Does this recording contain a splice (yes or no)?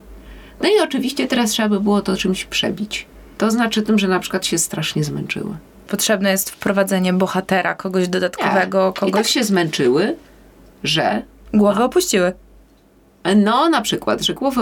no